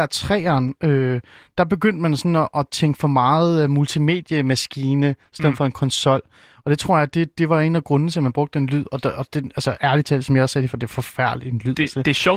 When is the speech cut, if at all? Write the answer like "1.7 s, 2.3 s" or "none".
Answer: none